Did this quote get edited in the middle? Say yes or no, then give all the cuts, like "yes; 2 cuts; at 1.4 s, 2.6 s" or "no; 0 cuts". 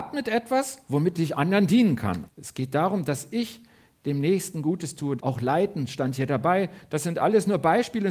yes; 2 cuts; at 2.3 s, 5.2 s